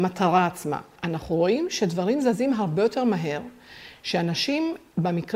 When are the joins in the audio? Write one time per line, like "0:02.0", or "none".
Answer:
0:01.0